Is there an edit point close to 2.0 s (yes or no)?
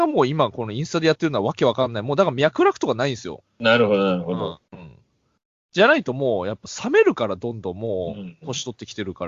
no